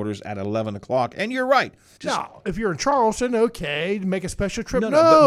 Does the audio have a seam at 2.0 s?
yes; 1 cut; at 2.0 s

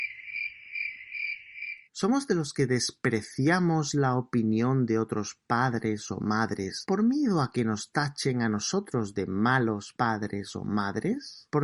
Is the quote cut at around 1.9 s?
yes; 1 cut; at 1.9 s

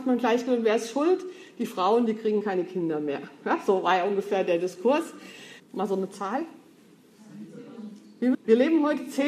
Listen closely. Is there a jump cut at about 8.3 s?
yes; 2 cuts; at 5.6 s, 8.3 s

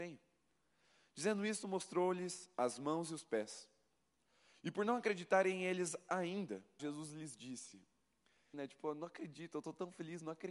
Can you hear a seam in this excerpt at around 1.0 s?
no; 2 cuts; at 6.8 s, 8.5 s

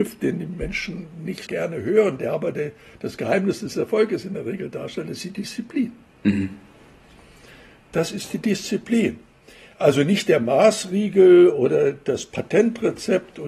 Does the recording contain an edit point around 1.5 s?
yes; 1 cut; at 1.5 s

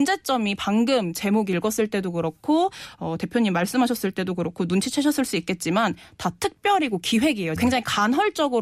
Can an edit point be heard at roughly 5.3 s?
no; 1 cut; at 7.6 s

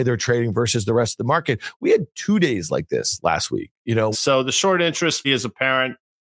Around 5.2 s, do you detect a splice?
yes; 2 cuts; at 4.1 s, 5.2 s

